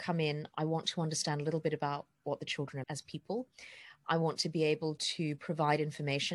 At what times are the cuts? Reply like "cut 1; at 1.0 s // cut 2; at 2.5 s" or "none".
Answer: cut 1; at 2.8 s